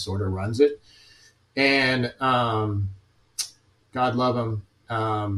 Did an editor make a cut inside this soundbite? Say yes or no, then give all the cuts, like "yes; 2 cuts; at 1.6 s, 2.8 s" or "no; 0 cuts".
yes; 1 cut; at 3.8 s